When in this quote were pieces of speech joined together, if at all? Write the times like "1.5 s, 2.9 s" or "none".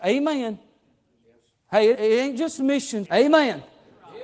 1.9 s, 3.0 s